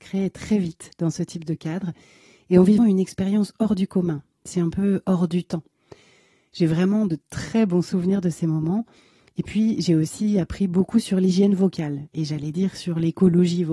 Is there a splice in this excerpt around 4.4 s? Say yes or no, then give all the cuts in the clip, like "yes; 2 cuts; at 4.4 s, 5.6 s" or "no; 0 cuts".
no; 1 cut; at 2.8 s